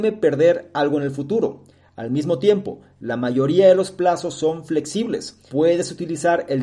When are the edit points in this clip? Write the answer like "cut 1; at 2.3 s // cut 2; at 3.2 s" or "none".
cut 1; at 5.5 s